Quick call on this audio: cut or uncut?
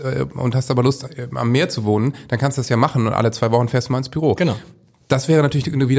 uncut